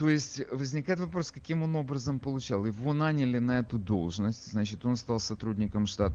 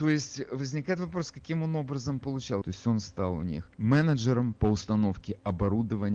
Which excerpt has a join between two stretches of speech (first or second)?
second